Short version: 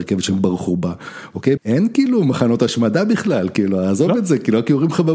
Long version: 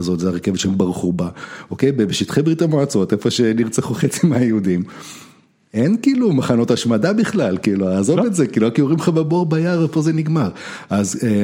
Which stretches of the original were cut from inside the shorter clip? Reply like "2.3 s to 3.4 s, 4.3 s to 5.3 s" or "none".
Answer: 1.9 s to 5.7 s

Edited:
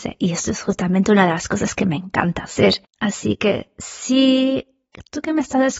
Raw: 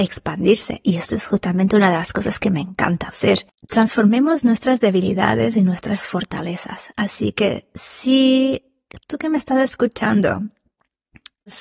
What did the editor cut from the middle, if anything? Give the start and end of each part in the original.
3.6 s to 6.9 s

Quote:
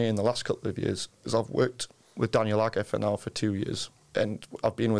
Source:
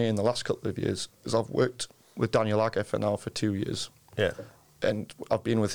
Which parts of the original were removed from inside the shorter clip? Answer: 3.9 s to 4.6 s

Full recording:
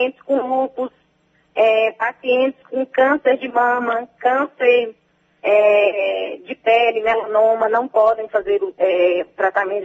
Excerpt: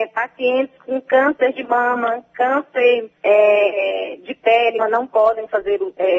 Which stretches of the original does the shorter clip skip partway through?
5.0 s to 5.3 s, 7.0 s to 7.6 s

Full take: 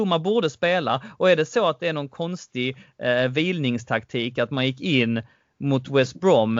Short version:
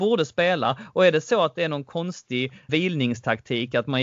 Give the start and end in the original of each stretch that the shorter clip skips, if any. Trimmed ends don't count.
2.9 s to 3.3 s

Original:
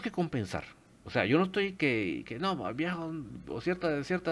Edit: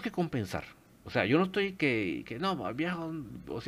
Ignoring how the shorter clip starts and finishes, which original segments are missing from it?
none

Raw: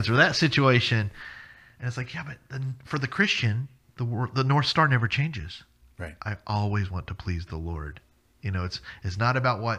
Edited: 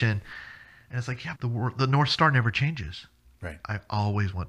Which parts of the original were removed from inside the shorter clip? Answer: 2.2 s to 3.9 s

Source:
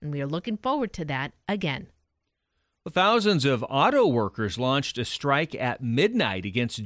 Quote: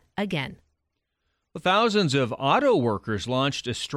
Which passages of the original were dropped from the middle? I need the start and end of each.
none

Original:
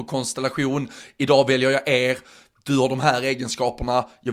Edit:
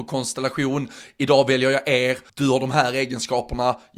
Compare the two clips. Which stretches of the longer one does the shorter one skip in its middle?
2.3 s to 2.6 s

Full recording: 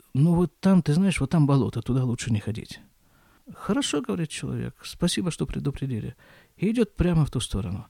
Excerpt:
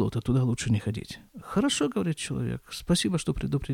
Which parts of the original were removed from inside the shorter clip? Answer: 2.9 s to 3.4 s

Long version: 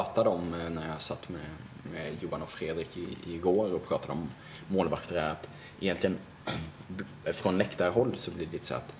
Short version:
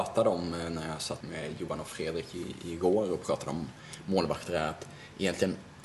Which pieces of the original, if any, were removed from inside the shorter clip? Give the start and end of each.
1.2 s to 1.8 s

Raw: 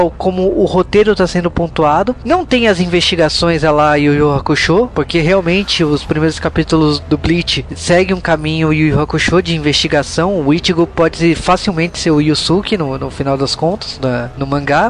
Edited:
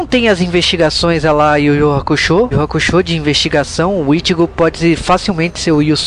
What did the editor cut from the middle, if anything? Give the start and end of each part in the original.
4.9 s to 8.9 s

